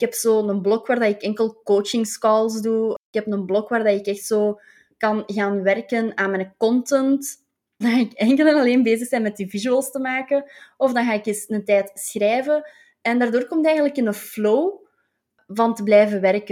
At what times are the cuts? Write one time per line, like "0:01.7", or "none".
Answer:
0:07.8